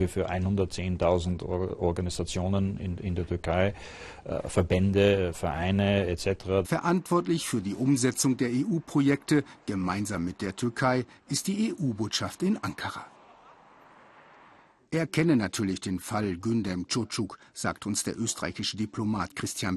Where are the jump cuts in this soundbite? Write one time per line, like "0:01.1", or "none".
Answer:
0:06.6